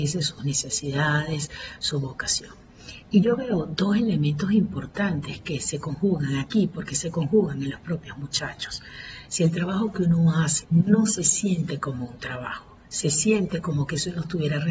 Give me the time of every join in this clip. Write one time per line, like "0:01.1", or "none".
0:09.2
0:10.6